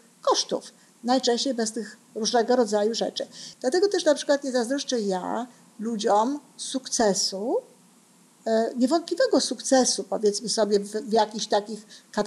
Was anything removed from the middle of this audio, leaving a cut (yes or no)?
yes